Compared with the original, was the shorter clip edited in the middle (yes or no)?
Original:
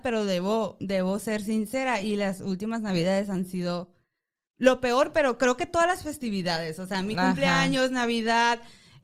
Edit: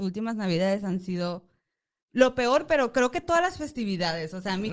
no